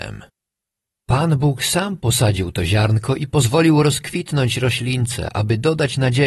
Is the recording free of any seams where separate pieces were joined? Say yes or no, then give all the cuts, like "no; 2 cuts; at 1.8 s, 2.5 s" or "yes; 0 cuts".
yes; 0 cuts